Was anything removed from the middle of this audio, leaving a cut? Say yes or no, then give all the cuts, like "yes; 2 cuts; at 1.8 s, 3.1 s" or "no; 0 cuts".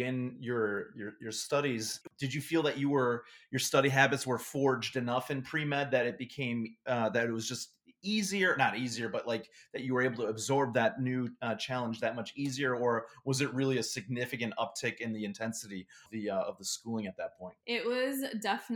yes; 1 cut; at 17.6 s